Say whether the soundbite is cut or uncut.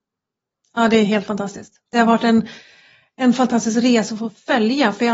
uncut